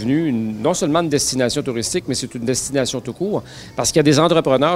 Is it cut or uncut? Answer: uncut